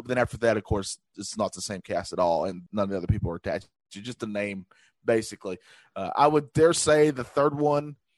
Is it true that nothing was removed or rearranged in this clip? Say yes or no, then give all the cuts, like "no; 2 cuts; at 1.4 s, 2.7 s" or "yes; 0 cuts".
no; 1 cut; at 2.7 s